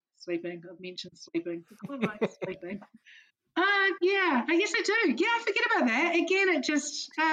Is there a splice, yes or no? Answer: yes